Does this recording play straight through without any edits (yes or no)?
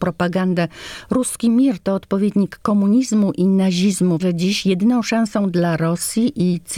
no